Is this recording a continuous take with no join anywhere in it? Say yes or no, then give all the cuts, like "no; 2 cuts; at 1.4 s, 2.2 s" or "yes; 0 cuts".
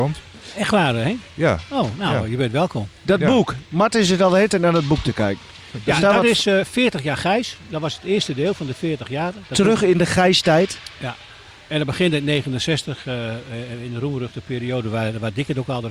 yes; 0 cuts